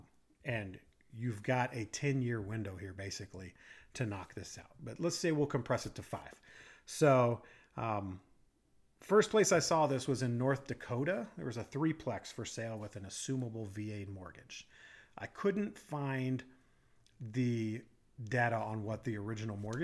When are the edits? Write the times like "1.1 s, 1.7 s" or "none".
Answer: none